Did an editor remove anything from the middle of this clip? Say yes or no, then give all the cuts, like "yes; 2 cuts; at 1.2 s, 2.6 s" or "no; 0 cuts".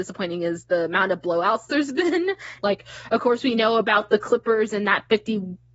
yes; 1 cut; at 2.6 s